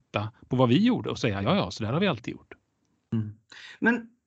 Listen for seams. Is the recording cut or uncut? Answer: uncut